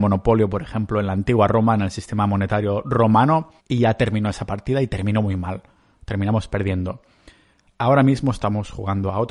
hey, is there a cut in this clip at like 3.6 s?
yes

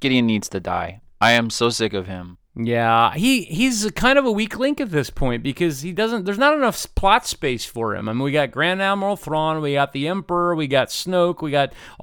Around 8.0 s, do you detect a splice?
no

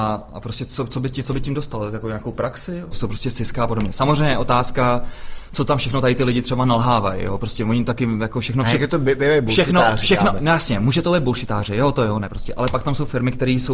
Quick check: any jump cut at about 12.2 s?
no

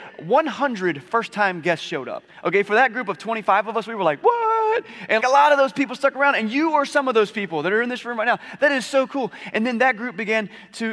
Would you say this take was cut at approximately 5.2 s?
yes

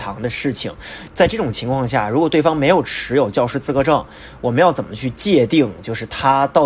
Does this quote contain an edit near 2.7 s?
no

